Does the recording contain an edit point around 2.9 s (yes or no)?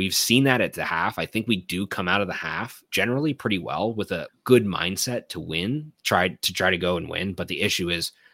yes